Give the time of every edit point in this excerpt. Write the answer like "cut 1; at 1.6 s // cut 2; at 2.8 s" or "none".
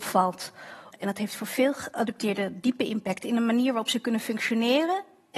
cut 1; at 0.9 s